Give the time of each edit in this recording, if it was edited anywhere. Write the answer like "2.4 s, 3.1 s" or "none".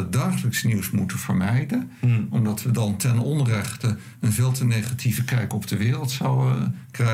none